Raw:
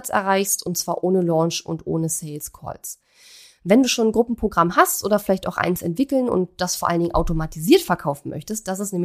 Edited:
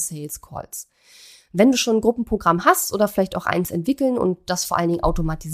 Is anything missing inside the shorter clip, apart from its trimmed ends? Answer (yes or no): no